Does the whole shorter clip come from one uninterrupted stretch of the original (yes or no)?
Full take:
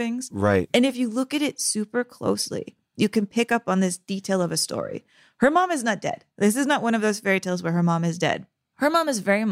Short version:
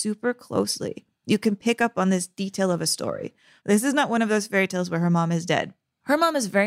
no